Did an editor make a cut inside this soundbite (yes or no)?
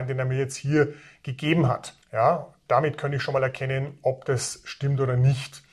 yes